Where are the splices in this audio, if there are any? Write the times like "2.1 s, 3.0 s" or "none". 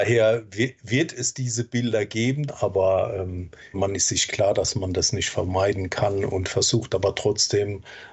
2.5 s, 3.7 s